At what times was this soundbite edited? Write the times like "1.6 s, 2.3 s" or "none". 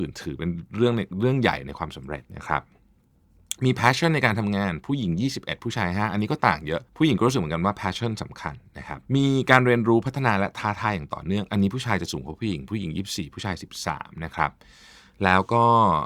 2.3 s, 6.9 s, 9.1 s